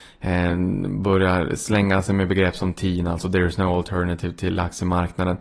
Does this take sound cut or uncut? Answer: uncut